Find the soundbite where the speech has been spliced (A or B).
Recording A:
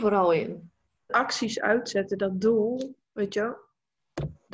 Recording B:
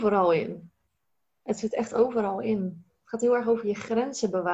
A